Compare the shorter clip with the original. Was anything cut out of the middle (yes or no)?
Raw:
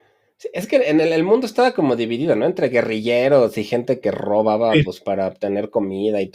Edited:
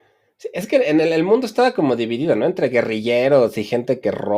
no